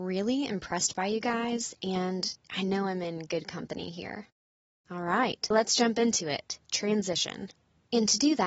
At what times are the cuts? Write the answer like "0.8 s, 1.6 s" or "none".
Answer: 5.5 s